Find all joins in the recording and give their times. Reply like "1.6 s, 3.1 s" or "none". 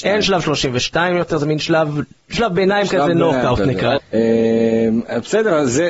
4.0 s